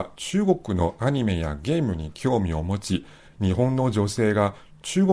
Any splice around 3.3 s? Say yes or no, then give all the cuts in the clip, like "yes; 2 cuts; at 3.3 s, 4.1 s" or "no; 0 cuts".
no; 0 cuts